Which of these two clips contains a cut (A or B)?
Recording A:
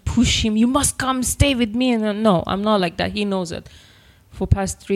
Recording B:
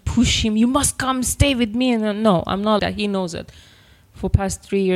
B